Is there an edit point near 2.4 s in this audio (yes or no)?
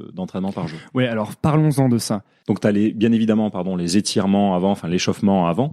yes